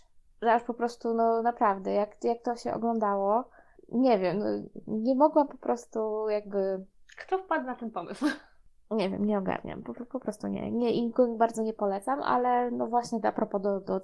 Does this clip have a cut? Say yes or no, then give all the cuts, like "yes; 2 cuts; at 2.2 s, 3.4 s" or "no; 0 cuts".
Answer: no; 0 cuts